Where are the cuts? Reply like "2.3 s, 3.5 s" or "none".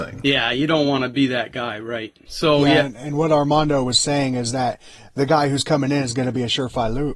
2.3 s